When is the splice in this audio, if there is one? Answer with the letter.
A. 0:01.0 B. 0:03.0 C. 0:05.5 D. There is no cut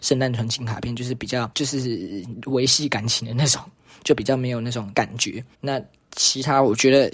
C